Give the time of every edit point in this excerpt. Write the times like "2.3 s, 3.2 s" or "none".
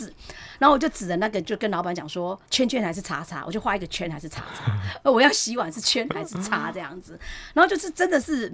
2.5 s